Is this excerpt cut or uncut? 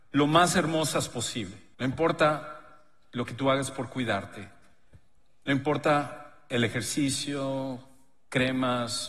cut